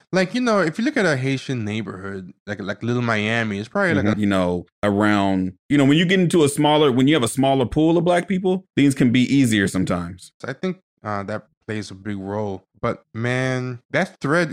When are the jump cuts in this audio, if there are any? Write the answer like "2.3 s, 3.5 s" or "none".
4.1 s, 10.4 s